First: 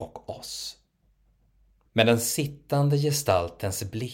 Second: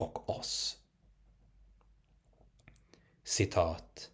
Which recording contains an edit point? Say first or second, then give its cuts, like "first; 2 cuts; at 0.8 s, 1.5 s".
first; 1 cut; at 1.9 s